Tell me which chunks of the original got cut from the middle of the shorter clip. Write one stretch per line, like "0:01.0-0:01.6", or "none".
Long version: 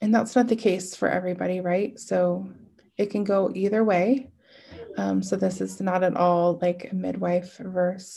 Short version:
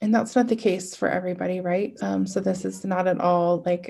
0:02.0-0:04.9